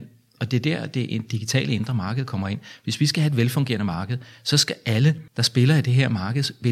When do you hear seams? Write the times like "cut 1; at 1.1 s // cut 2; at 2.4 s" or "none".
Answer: cut 1; at 5.3 s